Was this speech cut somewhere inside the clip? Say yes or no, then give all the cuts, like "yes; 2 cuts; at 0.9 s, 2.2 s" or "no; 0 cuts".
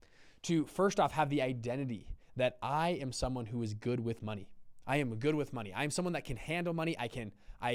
no; 0 cuts